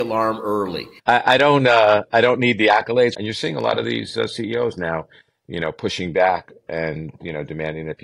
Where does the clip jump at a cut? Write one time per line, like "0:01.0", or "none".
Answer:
0:01.0
0:03.1